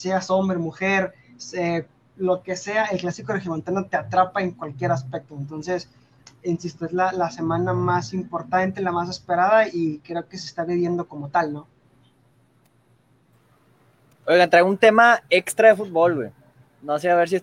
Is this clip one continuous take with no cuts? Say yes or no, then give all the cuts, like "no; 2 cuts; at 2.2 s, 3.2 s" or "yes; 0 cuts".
yes; 0 cuts